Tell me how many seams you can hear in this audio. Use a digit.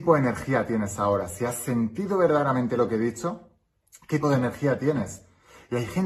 1